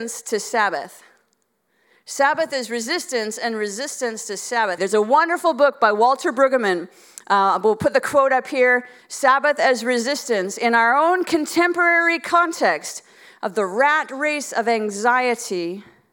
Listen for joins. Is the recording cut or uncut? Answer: cut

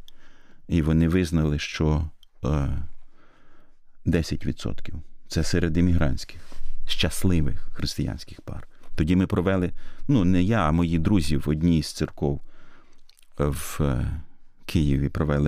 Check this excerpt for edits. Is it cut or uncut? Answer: uncut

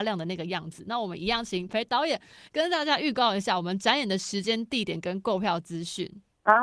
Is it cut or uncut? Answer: cut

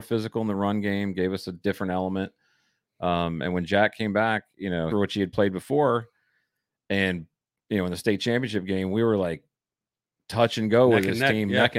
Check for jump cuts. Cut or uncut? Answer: cut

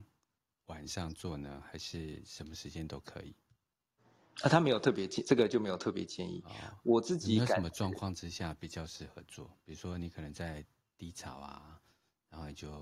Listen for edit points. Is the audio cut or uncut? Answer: uncut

